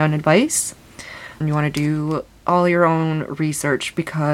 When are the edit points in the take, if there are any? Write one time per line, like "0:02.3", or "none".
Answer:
0:01.4

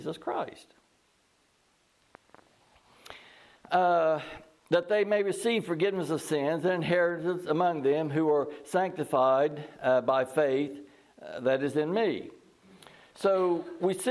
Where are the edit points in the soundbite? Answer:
none

